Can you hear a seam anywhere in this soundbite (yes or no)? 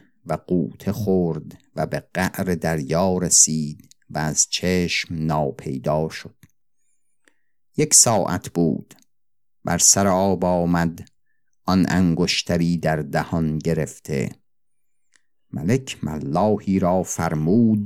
no